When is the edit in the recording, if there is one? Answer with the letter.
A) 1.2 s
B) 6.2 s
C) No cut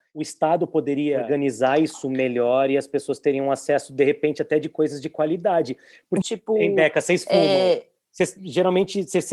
B